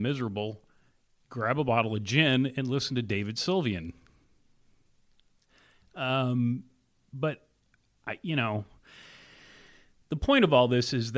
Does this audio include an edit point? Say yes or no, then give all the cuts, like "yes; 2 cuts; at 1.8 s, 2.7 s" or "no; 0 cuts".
no; 0 cuts